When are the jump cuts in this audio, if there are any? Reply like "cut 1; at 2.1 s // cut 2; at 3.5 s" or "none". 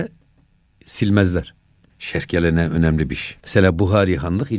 cut 1; at 1.9 s // cut 2; at 3.4 s